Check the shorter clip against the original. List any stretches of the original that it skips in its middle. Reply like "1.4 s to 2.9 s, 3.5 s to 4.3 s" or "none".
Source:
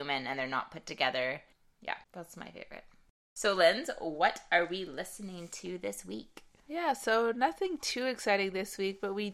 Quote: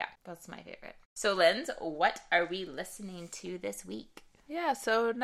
2.9 s to 3.2 s